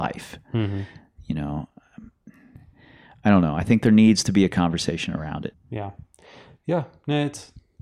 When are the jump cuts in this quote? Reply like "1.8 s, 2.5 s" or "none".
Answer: 5.5 s